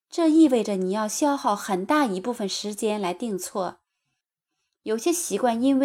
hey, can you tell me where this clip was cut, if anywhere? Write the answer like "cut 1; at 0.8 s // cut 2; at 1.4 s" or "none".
cut 1; at 4.7 s